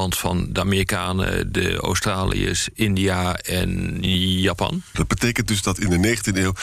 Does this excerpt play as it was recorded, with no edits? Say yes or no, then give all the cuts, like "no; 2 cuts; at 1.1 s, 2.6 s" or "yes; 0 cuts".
no; 1 cut; at 4.9 s